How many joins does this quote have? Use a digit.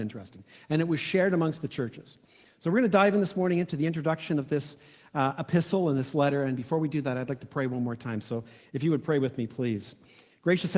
0